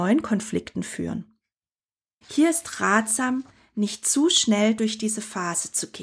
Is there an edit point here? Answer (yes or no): yes